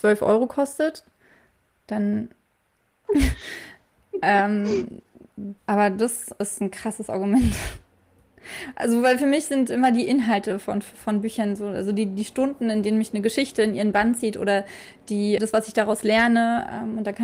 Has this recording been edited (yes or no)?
yes